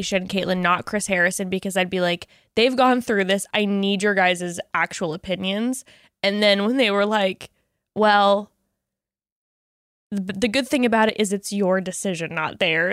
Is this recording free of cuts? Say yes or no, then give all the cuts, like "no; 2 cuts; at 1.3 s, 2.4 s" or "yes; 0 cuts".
yes; 0 cuts